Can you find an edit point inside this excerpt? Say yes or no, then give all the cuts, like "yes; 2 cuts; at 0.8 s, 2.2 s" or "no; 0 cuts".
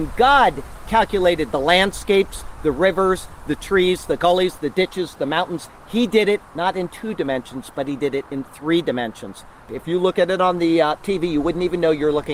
yes; 2 cuts; at 5.7 s, 9.7 s